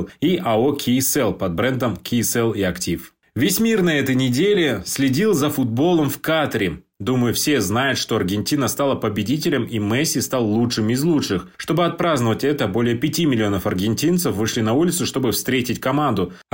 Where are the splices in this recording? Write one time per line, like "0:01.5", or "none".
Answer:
none